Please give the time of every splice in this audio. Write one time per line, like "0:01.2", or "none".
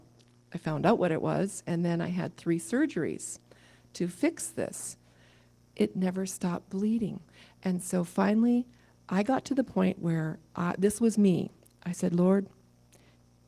none